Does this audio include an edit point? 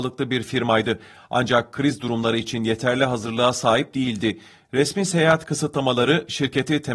no; 0 cuts

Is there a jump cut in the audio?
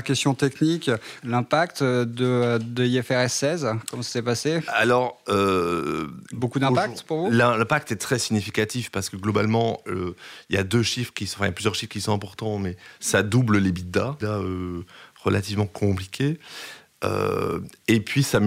yes; 2 cuts; at 1.2 s, 14.2 s

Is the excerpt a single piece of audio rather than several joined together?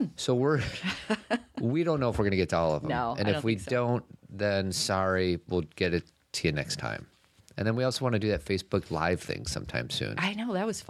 yes; 0 cuts

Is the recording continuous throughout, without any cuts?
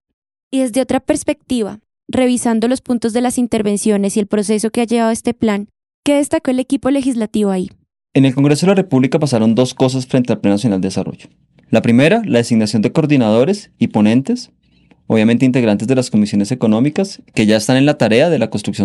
yes; 0 cuts

